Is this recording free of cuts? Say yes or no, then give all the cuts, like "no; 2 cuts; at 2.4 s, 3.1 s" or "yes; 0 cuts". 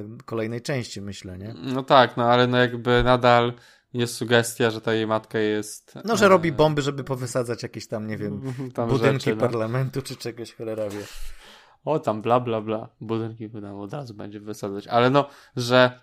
yes; 0 cuts